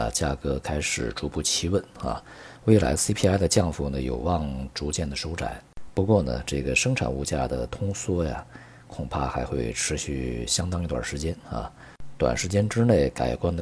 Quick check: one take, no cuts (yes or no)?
yes